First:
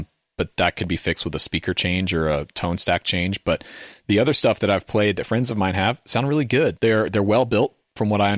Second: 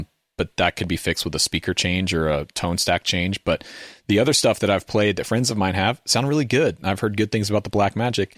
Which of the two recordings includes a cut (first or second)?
first